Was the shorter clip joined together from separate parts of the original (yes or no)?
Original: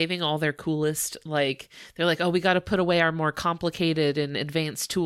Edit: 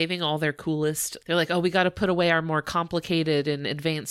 yes